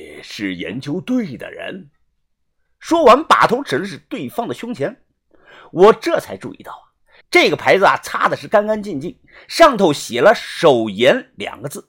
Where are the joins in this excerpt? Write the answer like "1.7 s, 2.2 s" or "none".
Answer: 7.2 s

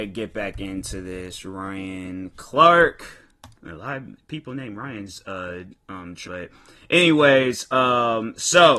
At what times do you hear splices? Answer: 3.6 s, 6.2 s

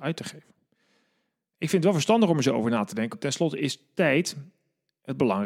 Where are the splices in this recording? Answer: 3.1 s

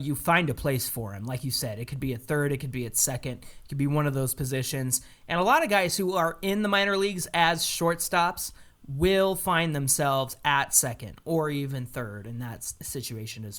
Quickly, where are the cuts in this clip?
none

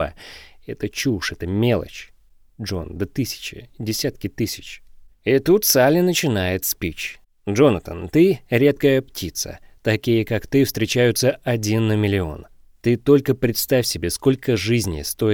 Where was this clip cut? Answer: 5.1 s

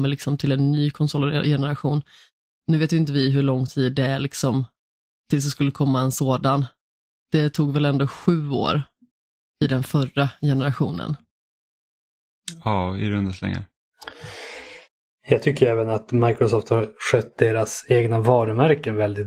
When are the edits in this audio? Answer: none

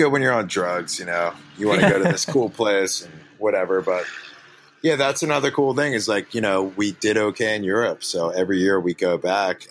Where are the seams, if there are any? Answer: none

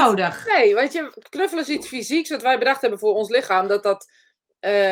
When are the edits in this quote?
none

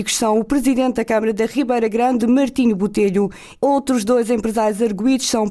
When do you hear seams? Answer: 2.2 s, 3.6 s

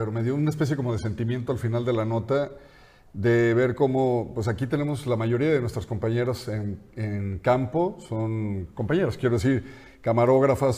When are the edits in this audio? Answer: none

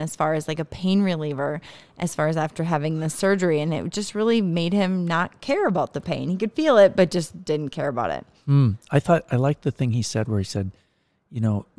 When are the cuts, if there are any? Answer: none

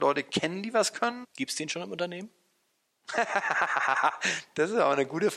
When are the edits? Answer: 1.2 s

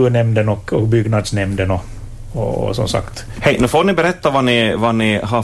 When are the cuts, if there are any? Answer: 3.4 s

